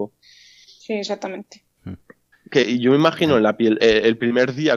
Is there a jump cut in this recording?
yes; 2 cuts; at 2.3 s, 3.8 s

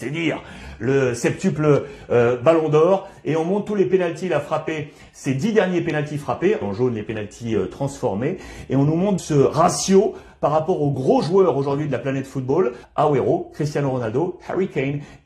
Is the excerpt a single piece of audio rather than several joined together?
no; 3 cuts; at 6.6 s, 9.2 s, 12.8 s

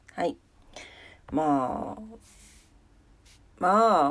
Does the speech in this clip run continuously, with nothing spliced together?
no; 1 cut; at 1.2 s

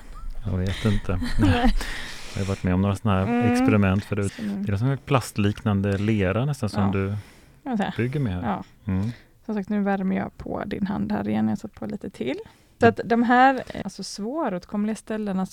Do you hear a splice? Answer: yes; 3 cuts; at 4.3 s, 12.8 s, 13.8 s

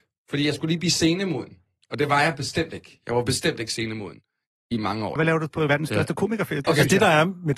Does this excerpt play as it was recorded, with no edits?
no; 2 cuts; at 5.2 s, 6.6 s

